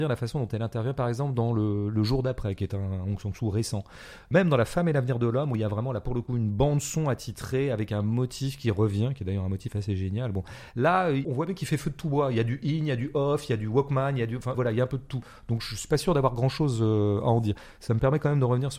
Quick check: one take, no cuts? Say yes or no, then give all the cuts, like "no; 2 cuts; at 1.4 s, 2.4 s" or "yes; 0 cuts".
yes; 0 cuts